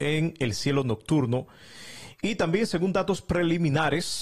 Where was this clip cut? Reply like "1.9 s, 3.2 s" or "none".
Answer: none